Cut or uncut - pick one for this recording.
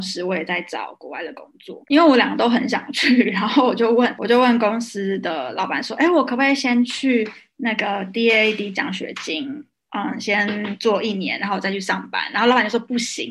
cut